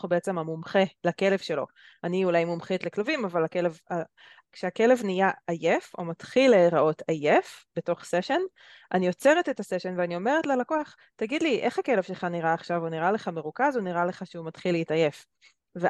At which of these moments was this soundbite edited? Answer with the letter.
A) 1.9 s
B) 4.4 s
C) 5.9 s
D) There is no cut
B